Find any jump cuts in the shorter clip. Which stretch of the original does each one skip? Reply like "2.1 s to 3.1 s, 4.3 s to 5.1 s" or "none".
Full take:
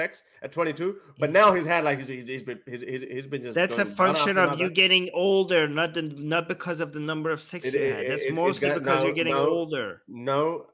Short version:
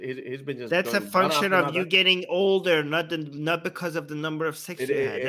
none